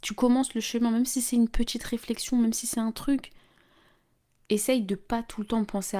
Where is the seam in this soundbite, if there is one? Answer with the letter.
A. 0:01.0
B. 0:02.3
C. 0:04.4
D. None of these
C